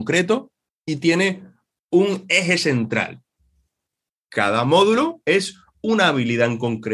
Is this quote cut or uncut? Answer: cut